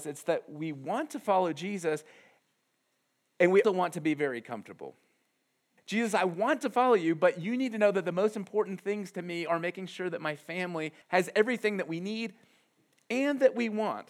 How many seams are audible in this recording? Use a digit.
3